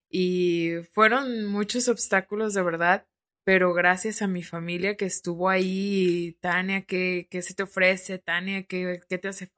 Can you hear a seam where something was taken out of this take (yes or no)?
no